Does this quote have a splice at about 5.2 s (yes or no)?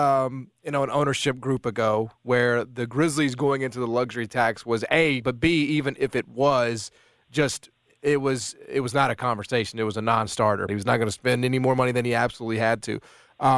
yes